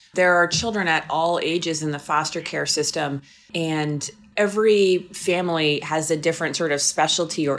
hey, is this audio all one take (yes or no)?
yes